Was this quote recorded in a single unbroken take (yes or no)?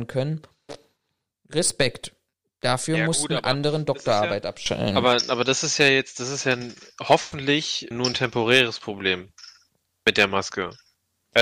no